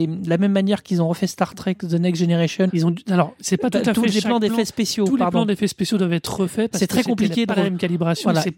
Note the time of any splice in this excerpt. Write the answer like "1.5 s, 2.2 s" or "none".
2.7 s